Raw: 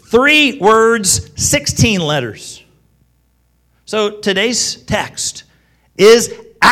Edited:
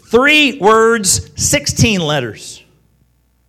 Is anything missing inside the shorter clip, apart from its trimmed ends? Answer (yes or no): no